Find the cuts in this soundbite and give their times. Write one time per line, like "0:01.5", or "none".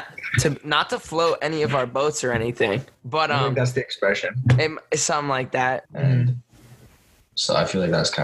0:05.8